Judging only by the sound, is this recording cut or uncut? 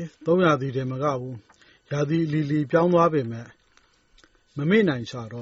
uncut